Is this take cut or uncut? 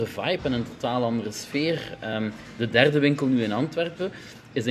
uncut